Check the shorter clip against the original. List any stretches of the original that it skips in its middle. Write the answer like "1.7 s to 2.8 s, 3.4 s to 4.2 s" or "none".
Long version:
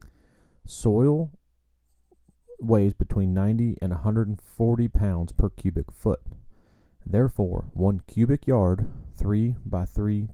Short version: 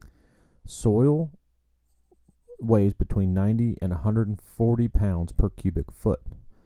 none